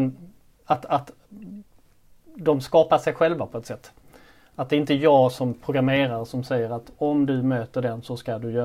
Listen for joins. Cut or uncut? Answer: uncut